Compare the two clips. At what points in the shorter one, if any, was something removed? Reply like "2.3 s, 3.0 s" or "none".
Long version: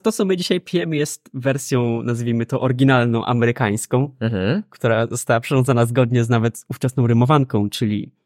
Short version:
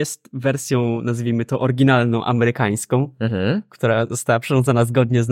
none